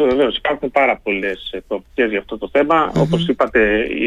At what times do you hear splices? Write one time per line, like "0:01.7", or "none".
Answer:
none